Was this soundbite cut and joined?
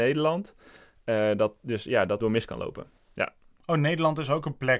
yes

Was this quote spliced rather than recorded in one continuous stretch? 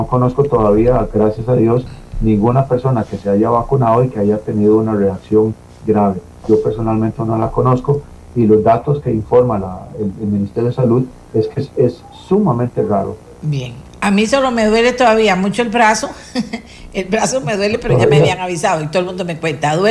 yes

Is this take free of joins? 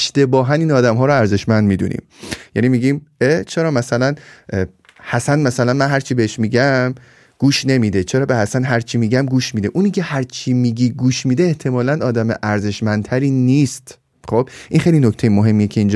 yes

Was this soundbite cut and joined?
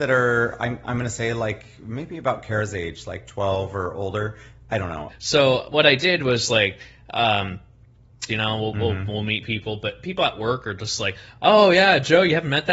yes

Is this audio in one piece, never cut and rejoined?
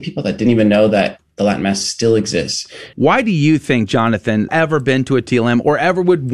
no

